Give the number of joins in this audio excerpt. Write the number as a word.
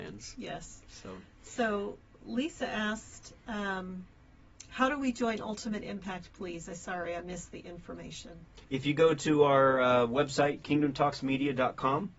one